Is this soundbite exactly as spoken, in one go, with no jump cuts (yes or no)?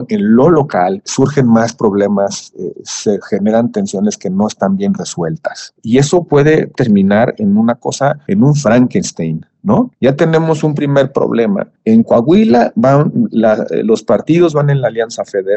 no